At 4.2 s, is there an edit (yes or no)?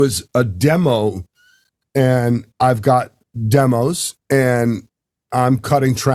yes